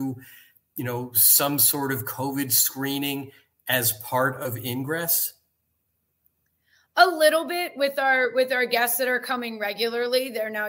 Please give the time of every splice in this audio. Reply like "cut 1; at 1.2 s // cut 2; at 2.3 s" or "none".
none